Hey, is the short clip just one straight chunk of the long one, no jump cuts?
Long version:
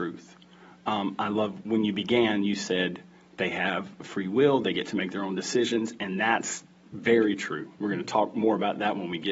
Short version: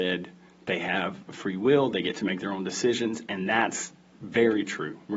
yes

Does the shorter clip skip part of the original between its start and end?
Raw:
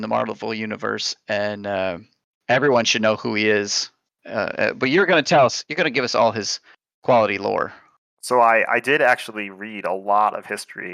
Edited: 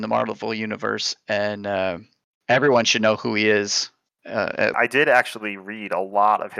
yes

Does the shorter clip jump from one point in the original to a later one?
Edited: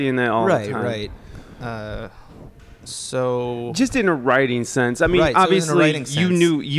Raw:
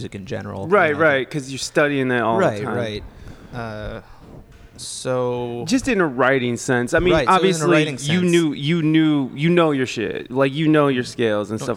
no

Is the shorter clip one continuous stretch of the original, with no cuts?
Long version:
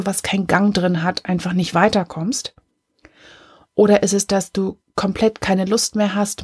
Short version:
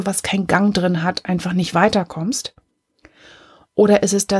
yes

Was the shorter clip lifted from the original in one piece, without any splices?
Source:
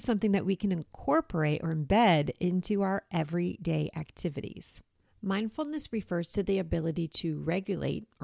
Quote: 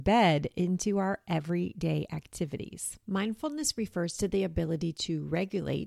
no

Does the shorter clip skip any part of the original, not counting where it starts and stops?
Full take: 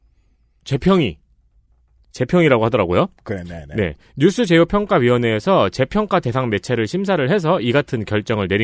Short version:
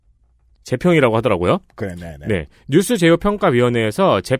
no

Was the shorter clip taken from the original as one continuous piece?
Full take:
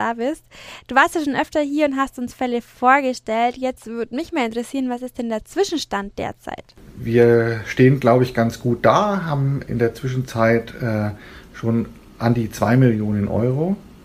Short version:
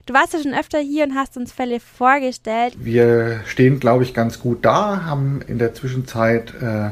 no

